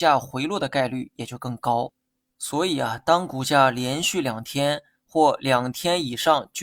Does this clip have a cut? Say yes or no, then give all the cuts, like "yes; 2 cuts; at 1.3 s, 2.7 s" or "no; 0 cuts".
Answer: no; 0 cuts